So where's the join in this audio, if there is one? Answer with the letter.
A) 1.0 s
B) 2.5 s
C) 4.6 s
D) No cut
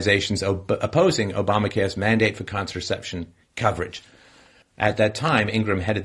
C